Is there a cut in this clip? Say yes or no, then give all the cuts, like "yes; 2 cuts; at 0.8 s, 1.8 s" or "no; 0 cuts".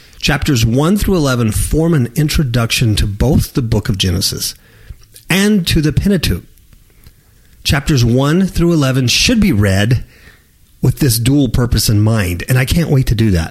no; 0 cuts